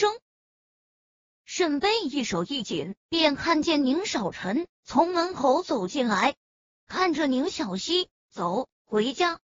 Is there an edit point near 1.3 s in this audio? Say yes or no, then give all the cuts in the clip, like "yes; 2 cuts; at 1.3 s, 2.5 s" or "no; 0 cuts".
no; 2 cuts; at 3.0 s, 6.8 s